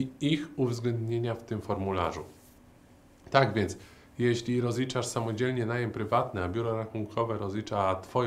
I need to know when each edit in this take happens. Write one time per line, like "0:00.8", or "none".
none